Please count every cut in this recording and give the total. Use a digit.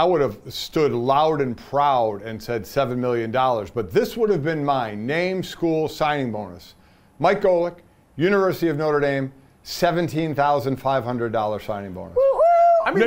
0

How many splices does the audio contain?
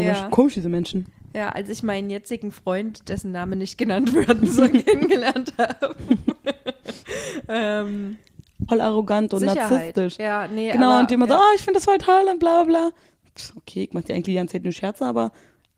1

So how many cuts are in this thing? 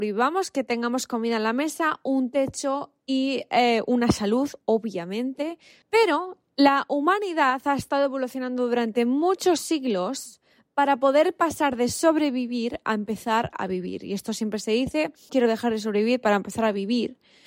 2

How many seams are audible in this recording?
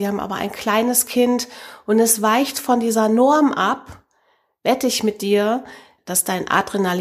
0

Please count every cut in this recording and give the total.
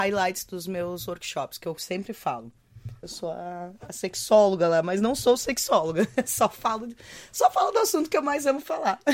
1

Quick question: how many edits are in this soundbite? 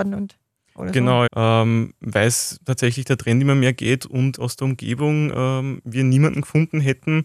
1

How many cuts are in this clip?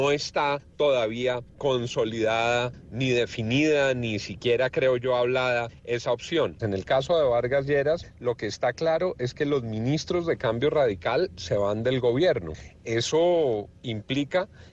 1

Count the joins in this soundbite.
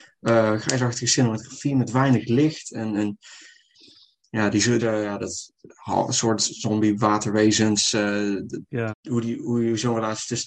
2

